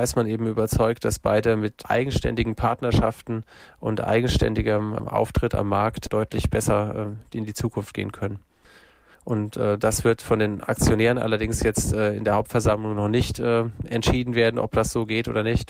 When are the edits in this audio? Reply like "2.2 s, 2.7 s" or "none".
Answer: none